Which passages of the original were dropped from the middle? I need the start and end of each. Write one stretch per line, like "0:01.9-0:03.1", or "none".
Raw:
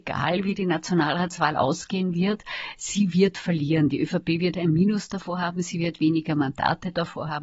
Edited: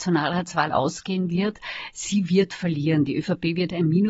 none

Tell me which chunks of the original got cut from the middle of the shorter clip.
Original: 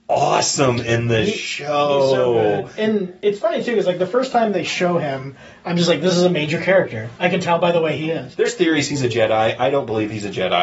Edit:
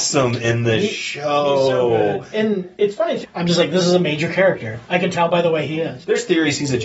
0:03.6-0:05.5

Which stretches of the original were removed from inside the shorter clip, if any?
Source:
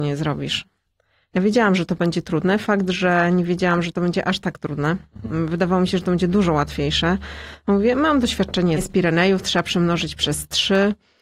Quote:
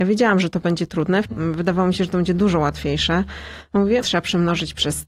0:02.6-0:05.2
0:07.9-0:09.4

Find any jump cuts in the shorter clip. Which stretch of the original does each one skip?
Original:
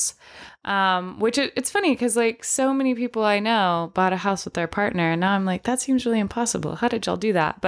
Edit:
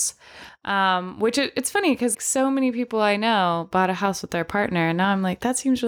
0:02.1-0:02.4

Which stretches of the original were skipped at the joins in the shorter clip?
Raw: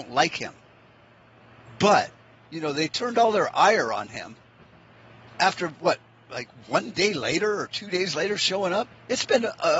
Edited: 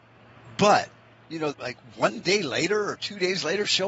0:02.7-0:06.2

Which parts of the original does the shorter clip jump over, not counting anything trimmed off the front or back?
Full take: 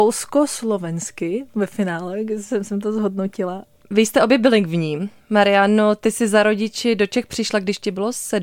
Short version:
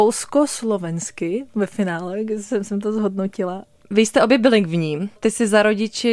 0:05.2-0:06.0

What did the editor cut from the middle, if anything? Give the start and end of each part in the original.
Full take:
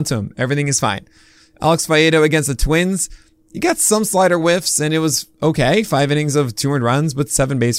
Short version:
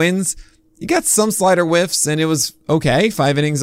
none

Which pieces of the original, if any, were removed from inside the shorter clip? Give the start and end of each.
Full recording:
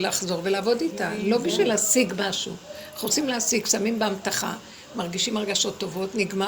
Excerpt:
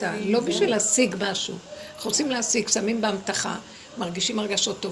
none

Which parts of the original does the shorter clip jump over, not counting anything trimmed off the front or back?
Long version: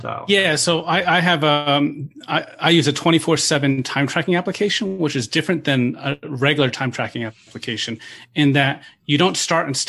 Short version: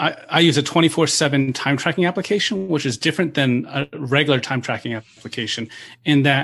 none

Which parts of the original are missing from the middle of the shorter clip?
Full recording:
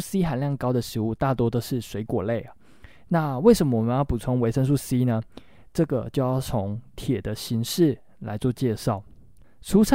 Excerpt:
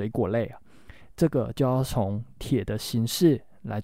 0:02.9-0:05.6

